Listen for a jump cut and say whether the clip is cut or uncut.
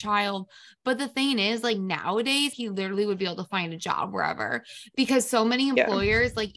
cut